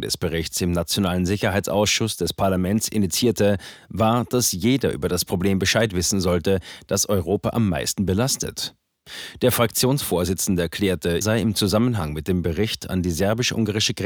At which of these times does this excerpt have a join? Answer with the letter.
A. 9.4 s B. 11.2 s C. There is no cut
B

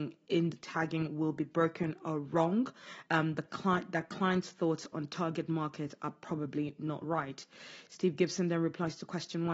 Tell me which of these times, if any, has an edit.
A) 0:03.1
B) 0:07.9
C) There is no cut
C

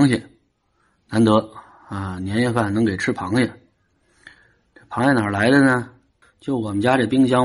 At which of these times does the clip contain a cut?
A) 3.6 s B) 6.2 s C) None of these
B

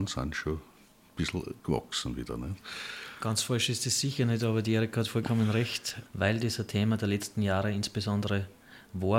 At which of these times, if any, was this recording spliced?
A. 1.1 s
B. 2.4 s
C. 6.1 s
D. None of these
C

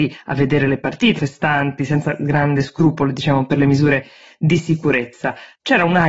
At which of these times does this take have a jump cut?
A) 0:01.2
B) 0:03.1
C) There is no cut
A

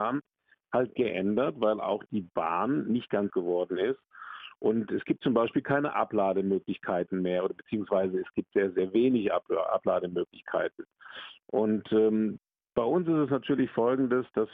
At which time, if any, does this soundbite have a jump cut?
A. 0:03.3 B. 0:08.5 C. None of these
A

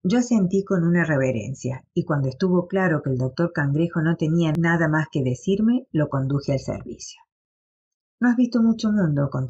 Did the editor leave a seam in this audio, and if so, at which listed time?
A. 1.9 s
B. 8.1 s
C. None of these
B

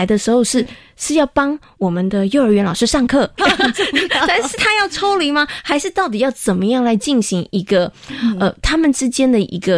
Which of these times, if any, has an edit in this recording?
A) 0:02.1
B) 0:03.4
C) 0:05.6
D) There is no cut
B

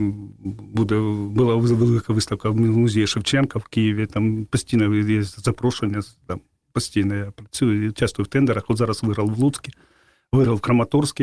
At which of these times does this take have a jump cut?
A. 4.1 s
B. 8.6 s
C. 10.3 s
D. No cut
D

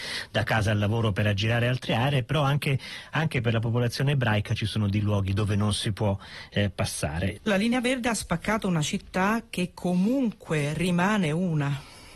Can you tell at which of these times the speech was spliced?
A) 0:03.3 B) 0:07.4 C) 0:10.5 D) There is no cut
B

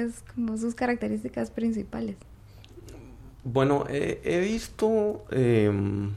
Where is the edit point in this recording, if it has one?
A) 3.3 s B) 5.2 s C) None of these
C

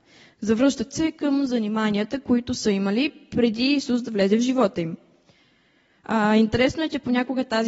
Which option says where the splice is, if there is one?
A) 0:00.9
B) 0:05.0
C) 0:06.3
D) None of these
D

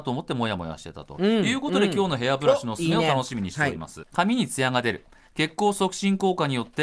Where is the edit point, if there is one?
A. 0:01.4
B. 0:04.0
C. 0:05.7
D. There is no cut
B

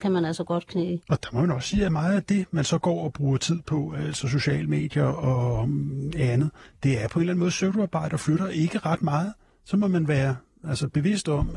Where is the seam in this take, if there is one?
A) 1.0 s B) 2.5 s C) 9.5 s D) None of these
A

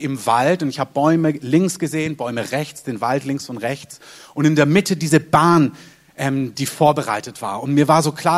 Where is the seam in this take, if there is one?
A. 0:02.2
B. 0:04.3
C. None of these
C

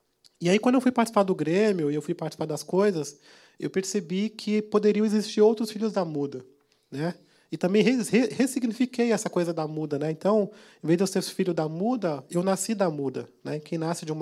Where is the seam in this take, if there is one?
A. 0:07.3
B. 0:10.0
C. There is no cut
C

